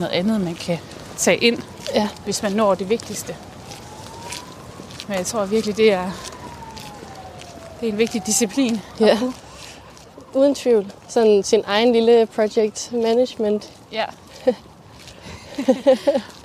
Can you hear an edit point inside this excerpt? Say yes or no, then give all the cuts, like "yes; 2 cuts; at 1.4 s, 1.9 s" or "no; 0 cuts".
no; 0 cuts